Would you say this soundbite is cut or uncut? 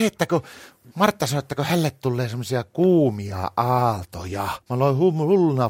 cut